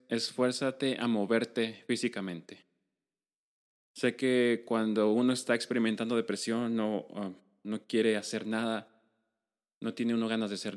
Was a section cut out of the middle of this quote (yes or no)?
no